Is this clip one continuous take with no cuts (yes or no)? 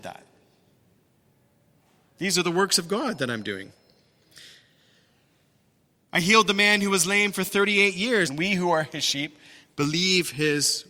no